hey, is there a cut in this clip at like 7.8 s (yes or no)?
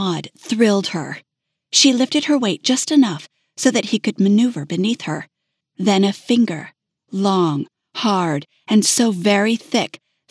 no